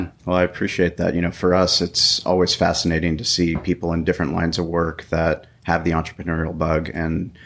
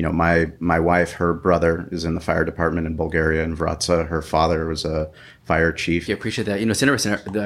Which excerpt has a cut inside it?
second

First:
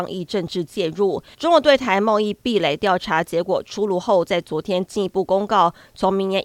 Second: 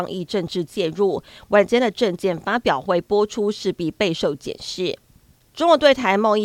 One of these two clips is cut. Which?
first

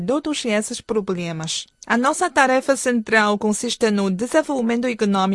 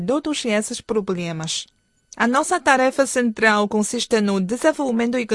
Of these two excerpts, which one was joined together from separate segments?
first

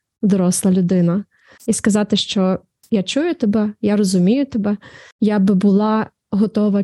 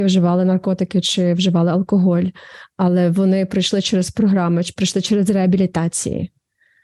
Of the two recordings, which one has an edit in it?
first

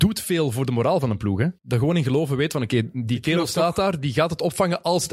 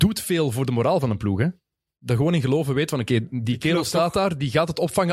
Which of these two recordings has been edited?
first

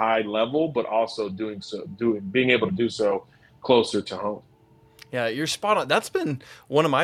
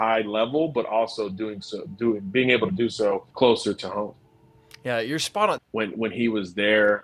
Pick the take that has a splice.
second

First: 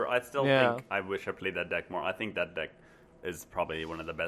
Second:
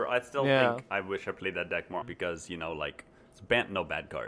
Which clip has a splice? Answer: second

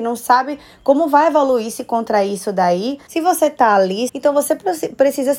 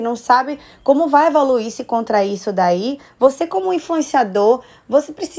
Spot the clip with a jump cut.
first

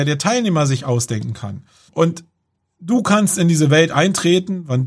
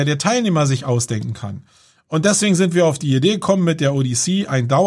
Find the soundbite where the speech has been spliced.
first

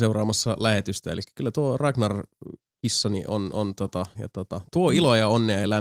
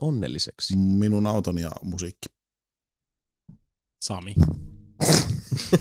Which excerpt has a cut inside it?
first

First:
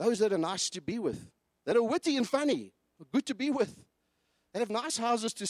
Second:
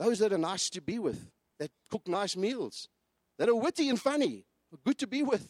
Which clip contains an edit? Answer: first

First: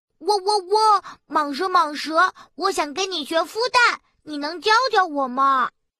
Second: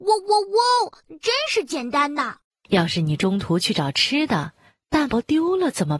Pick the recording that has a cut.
second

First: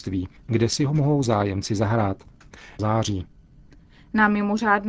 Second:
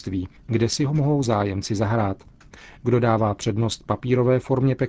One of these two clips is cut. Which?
first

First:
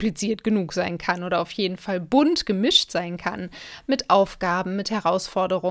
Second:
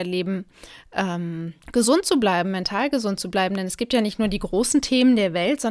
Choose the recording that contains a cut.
second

